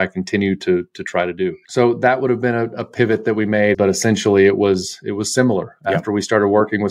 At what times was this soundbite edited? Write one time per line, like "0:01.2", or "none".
0:03.7